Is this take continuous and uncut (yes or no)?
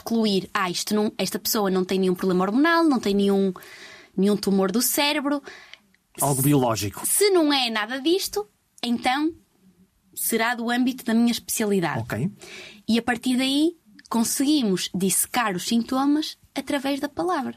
yes